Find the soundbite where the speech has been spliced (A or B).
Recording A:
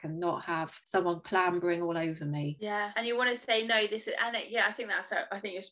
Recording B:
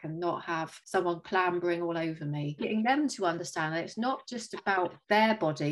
B